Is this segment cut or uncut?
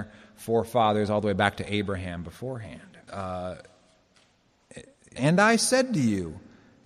cut